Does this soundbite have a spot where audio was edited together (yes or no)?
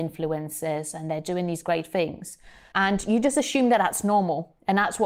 yes